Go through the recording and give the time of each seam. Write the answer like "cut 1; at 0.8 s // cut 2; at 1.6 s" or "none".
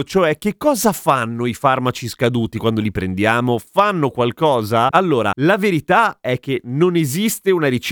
cut 1; at 4.9 s